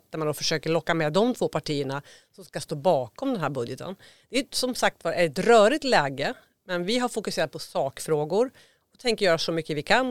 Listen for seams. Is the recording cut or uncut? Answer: uncut